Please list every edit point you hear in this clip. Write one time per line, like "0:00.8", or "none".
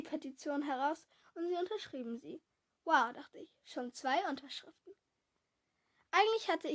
none